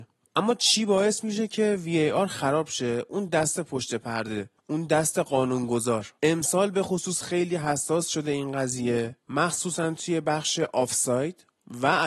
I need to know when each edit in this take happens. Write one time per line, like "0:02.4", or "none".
0:04.6